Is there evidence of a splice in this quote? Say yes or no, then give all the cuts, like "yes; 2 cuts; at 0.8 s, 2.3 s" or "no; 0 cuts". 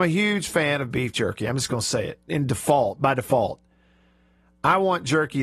yes; 1 cut; at 2.3 s